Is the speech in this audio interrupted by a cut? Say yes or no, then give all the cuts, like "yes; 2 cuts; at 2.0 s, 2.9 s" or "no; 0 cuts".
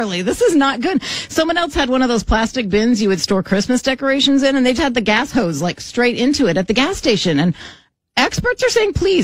yes; 1 cut; at 4.8 s